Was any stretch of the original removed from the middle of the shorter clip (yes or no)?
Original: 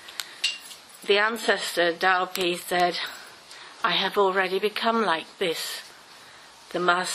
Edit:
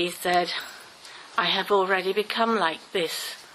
no